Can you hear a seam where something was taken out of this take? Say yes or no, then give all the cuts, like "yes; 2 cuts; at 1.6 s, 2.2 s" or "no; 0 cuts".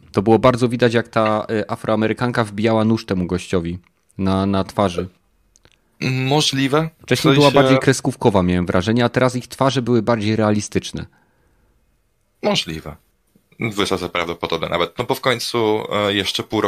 no; 0 cuts